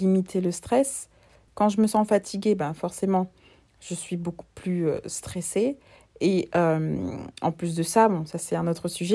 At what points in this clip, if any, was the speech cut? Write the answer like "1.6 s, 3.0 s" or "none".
1.5 s